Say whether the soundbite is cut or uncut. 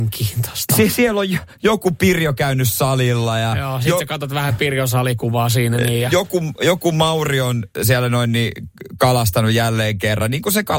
uncut